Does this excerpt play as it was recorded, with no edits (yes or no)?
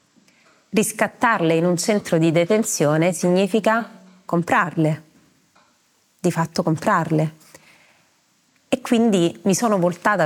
no